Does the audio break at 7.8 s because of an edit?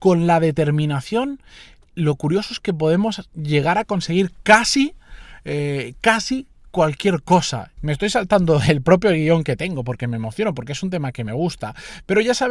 yes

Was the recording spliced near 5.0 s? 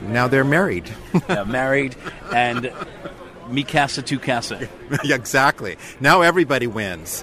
no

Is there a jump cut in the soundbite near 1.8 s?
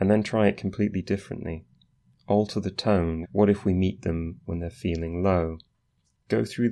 no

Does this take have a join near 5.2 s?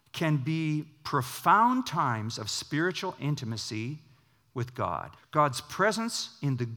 yes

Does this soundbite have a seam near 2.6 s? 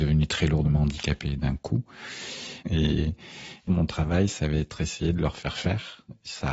yes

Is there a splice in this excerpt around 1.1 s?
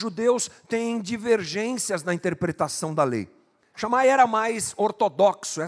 no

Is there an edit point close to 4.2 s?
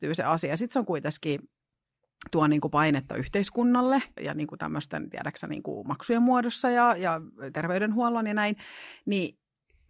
yes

